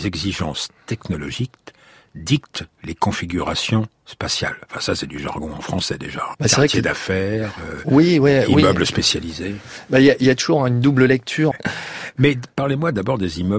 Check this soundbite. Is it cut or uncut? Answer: cut